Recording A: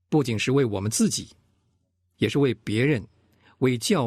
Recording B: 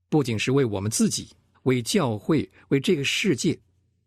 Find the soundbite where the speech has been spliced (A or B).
B